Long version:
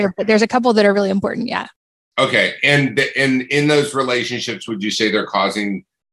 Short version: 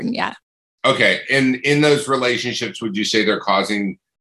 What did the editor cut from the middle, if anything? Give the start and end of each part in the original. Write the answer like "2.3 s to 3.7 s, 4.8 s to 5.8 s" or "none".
2.6 s to 3.1 s